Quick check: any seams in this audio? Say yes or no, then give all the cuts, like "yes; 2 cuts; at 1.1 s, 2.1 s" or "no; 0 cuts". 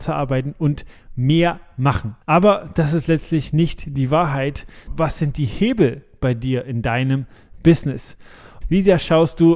yes; 3 cuts; at 2.2 s, 4.9 s, 8.6 s